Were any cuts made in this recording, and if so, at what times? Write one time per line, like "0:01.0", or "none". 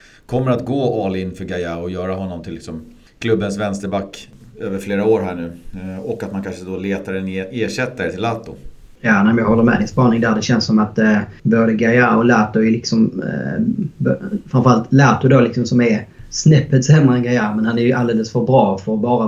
none